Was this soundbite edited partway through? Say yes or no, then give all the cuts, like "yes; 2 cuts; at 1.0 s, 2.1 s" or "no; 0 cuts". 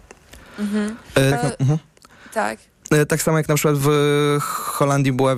yes; 1 cut; at 1.3 s